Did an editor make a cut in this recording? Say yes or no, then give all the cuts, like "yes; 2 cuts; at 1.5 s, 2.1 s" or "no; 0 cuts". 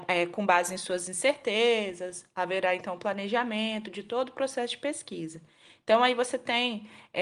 no; 0 cuts